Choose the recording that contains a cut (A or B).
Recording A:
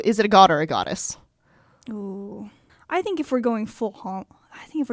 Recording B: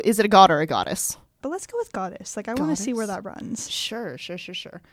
B